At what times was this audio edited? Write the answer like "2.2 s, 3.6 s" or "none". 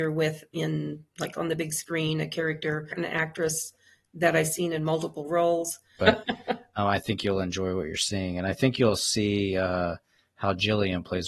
2.9 s, 6.0 s